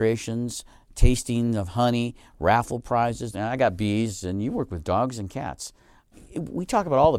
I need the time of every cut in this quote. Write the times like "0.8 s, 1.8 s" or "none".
3.3 s